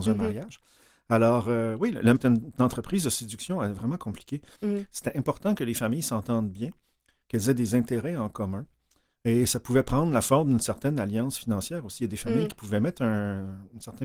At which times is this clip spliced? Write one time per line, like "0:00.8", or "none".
0:02.1
0:04.5